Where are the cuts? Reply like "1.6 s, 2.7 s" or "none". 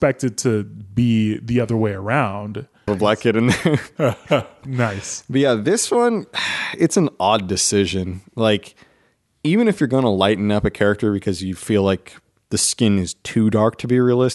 2.9 s